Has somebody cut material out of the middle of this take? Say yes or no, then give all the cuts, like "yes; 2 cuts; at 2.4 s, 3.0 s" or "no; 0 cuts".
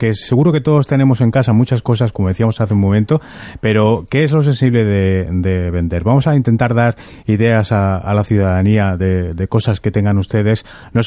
no; 0 cuts